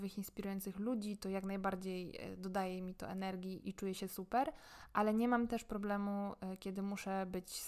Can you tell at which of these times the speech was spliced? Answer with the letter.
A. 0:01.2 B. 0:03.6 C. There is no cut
B